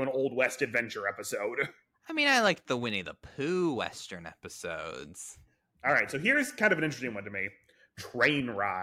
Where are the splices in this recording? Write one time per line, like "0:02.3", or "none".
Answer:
0:05.8